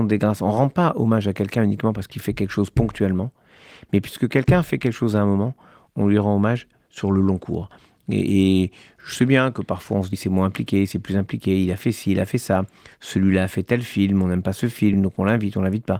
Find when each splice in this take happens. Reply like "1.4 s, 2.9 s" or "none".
10.1 s, 14.9 s